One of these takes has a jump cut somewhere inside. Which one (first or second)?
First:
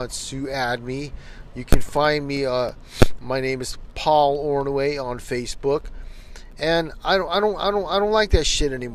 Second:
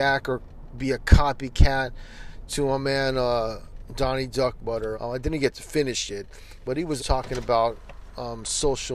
second